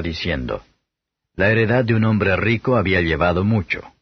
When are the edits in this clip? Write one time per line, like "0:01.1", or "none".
none

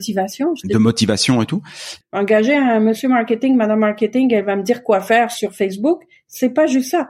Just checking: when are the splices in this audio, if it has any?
0:02.0

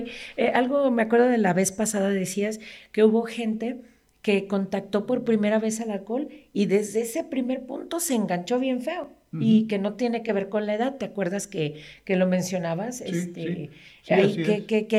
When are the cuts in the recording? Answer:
none

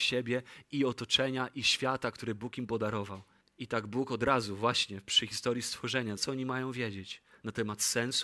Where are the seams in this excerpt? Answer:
0:03.4
0:06.2

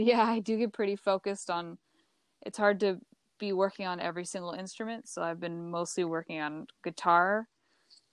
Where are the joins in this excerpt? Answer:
none

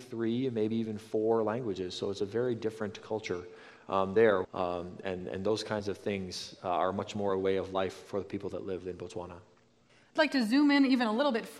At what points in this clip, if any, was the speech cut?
0:04.4

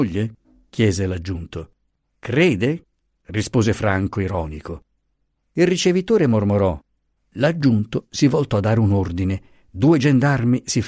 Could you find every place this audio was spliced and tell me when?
0:07.2

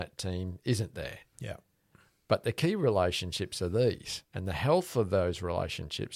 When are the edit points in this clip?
0:04.3

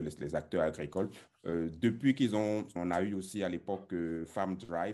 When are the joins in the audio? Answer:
0:01.3
0:02.8

